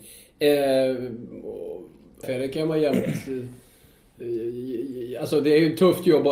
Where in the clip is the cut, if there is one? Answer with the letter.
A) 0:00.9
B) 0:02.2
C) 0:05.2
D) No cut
B